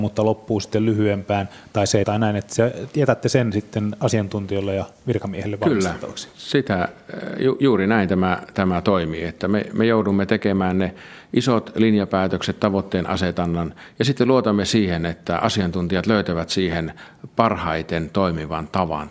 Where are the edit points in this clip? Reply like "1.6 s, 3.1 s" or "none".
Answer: 2.0 s